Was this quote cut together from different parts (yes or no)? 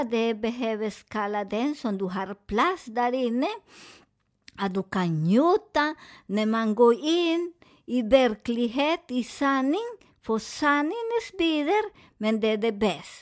no